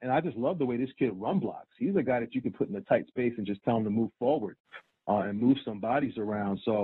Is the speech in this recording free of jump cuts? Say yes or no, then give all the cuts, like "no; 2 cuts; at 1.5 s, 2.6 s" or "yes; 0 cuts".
yes; 0 cuts